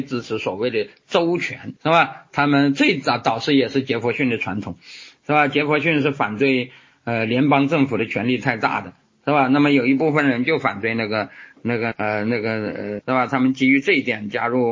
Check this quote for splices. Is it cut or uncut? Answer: cut